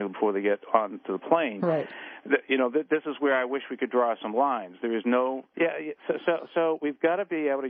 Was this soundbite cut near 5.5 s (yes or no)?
yes